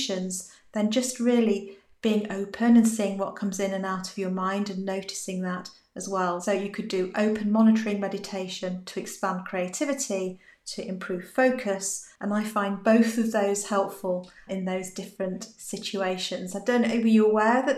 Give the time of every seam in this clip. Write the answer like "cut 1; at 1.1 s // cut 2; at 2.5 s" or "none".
cut 1; at 12.2 s